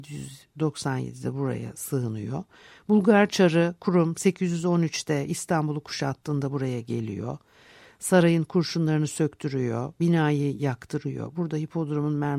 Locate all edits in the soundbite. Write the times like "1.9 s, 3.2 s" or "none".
none